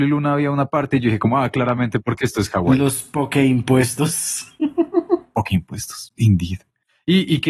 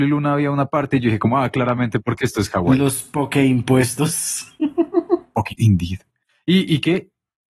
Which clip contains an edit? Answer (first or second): second